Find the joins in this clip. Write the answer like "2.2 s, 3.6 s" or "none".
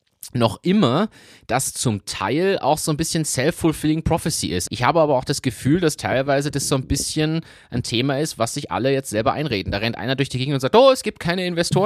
4.7 s